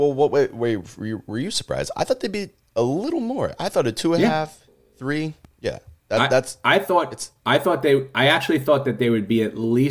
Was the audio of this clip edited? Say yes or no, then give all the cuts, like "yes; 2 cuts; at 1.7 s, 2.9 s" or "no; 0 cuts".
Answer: no; 0 cuts